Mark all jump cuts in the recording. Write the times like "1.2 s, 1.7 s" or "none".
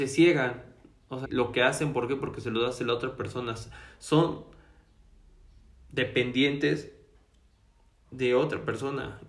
1.2 s